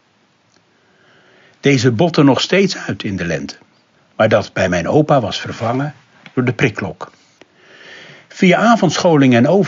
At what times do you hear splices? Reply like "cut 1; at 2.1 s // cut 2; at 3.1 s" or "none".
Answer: cut 1; at 4.0 s